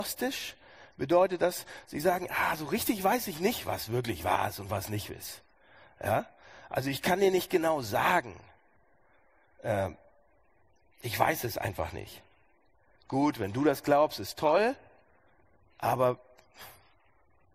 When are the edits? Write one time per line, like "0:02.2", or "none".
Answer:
none